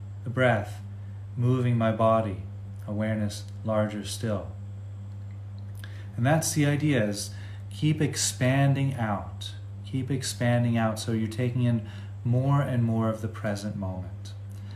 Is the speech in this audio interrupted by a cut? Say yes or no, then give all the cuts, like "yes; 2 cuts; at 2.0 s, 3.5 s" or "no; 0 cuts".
no; 0 cuts